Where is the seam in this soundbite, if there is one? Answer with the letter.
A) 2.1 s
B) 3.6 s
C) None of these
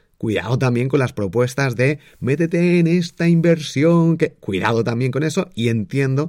C